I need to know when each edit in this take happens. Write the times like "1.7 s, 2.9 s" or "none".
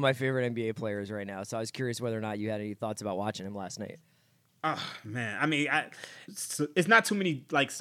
6.3 s